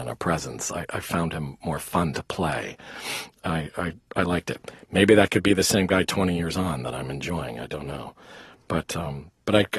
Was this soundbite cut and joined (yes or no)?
no